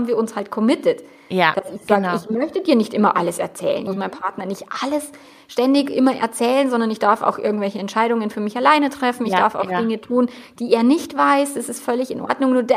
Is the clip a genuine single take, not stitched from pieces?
no; 1 cut; at 3.9 s

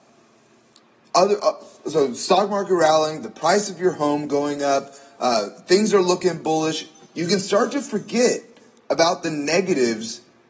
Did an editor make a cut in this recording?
no; 0 cuts

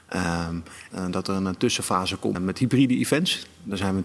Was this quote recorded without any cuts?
no; 2 cuts; at 0.9 s, 2.3 s

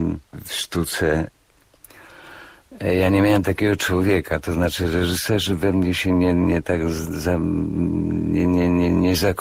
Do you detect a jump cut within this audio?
no; 0 cuts

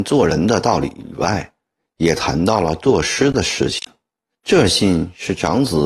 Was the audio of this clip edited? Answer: yes; 1 cut; at 4.4 s

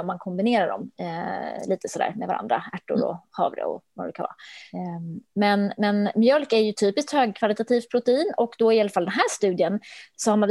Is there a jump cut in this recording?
no; 0 cuts

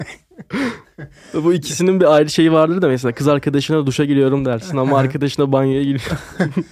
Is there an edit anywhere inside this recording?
no; 0 cuts

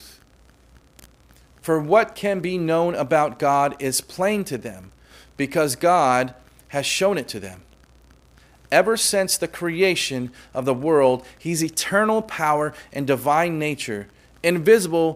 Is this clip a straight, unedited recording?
yes; 0 cuts

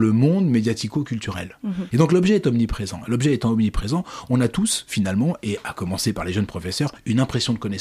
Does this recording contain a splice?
yes; 1 cut; at 1.9 s

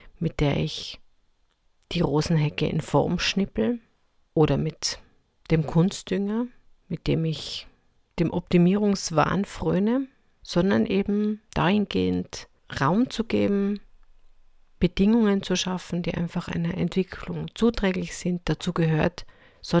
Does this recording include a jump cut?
no; 0 cuts

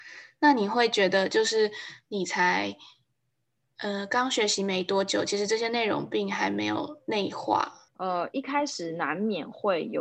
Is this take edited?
yes; 1 cut; at 7.9 s

